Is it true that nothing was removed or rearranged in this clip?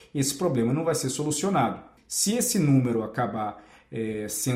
no; 1 cut; at 2.0 s

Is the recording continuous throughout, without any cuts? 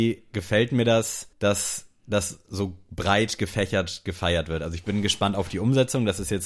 no; 1 cut; at 1.3 s

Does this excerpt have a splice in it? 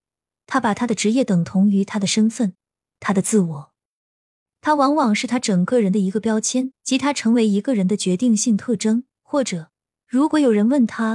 yes; 2 cuts; at 6.8 s, 9.1 s

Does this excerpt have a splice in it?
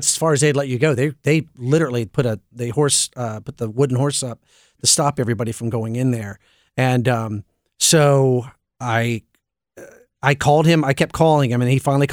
no; 0 cuts

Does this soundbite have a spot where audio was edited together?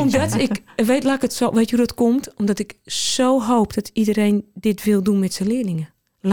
no; 0 cuts

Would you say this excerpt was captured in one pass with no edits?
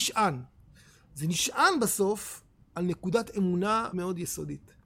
no; 1 cut; at 3.9 s

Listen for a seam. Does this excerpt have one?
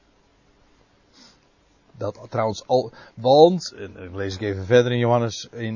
no; 0 cuts

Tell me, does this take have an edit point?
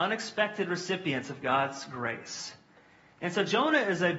no; 0 cuts

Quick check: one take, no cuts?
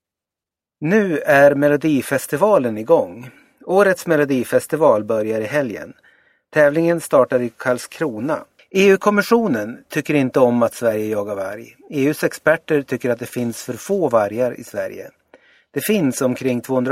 no; 1 cut; at 8.6 s

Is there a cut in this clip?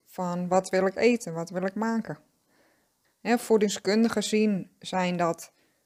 yes; 1 cut; at 3.0 s

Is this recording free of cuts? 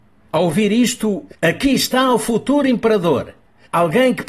no; 1 cut; at 1.3 s

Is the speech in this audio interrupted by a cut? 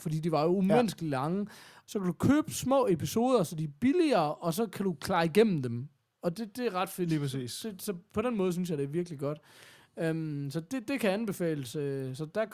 yes; 1 cut; at 1.9 s

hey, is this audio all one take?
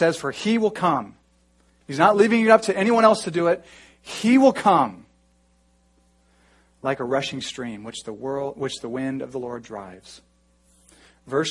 no; 1 cut; at 1.8 s

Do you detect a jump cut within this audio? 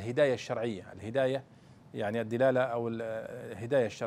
no; 0 cuts

